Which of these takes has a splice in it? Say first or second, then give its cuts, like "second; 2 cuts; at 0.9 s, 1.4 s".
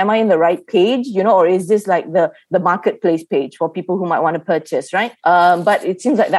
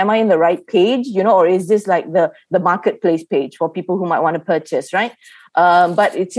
first; 1 cut; at 5.2 s